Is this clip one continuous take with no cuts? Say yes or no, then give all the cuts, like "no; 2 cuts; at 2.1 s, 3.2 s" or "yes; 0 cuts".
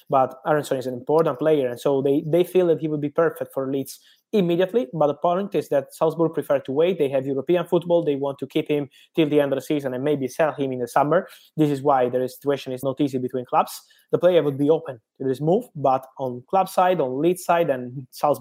no; 1 cut; at 12.8 s